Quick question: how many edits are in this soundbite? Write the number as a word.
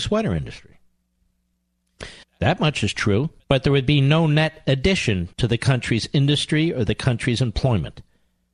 three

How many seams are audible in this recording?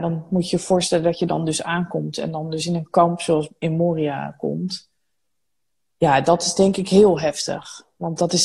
zero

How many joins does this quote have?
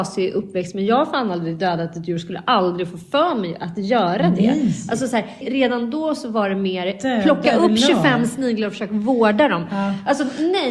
one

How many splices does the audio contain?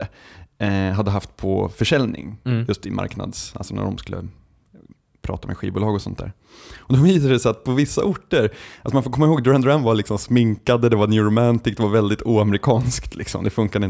zero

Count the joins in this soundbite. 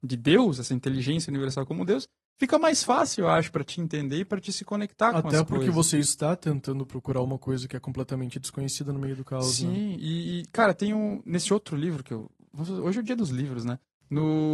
zero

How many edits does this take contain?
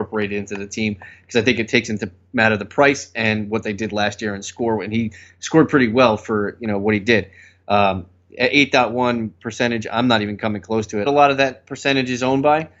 one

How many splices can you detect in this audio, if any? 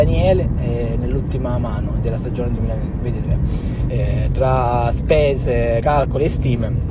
two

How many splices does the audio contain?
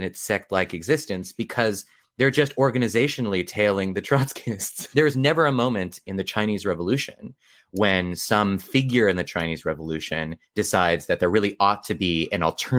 two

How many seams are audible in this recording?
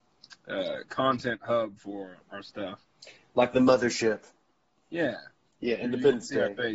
zero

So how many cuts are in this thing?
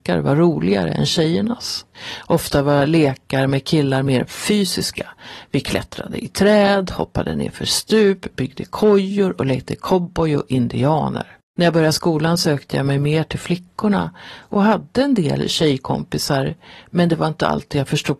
zero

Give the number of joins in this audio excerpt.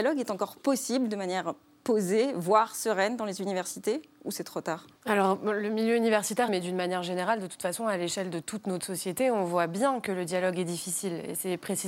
two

